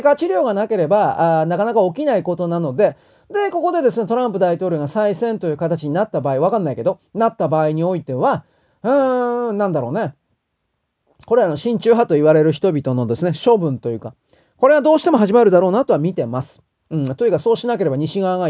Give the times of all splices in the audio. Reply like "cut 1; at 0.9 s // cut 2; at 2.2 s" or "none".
none